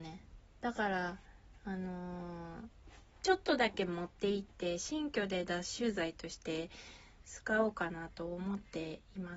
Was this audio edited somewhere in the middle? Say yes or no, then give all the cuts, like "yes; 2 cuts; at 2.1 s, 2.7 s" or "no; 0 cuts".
no; 0 cuts